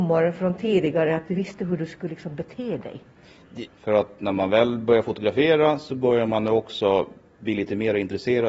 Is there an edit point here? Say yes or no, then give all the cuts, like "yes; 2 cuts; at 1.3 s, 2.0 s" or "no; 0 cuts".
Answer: yes; 1 cut; at 3.7 s